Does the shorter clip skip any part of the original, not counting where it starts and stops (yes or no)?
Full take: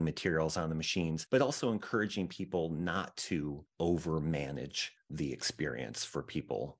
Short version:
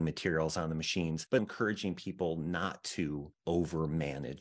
yes